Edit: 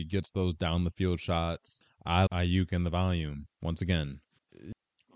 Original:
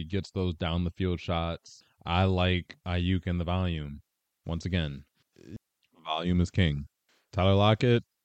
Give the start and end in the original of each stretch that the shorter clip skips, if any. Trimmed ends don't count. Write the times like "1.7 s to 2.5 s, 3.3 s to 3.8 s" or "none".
2.3 s to 2.8 s, 4.1 s to 4.4 s